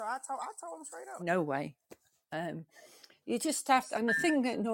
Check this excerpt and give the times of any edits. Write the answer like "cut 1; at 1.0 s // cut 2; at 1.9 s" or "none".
cut 1; at 1.2 s // cut 2; at 3.2 s